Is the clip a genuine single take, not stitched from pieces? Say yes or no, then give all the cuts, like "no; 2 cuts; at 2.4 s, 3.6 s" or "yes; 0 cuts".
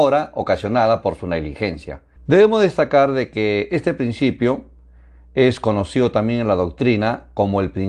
no; 1 cut; at 2.2 s